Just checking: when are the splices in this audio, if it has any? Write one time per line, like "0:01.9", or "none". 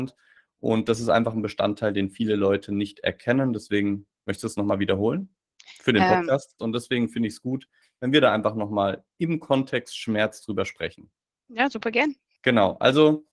0:06.6